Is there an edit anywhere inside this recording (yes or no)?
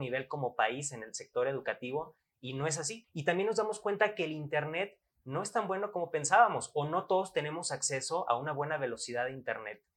yes